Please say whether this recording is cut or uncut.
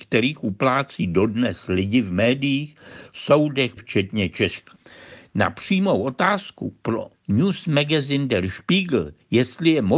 cut